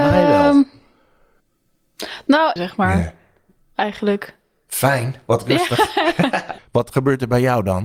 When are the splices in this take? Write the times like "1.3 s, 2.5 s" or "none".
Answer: 2.6 s, 6.6 s